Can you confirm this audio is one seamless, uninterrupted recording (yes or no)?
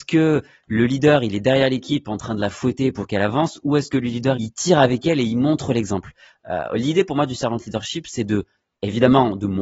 no